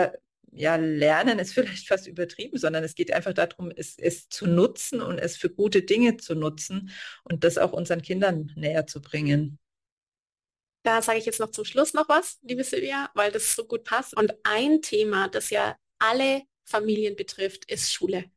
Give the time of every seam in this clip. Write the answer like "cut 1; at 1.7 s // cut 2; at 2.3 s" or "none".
cut 1; at 14.1 s